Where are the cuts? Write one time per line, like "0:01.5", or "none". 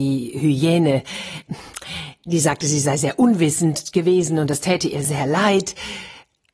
0:05.0